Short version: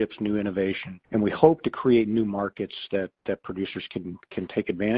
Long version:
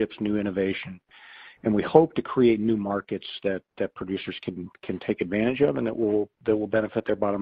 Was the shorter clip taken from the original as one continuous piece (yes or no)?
no